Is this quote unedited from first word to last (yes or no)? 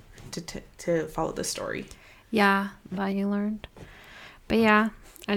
no